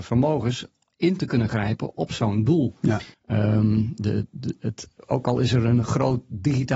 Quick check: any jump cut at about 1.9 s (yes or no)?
yes